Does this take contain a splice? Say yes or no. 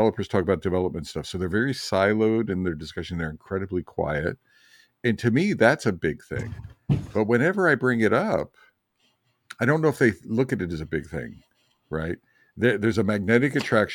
no